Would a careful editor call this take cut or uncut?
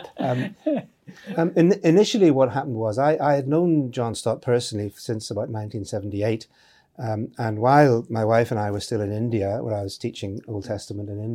uncut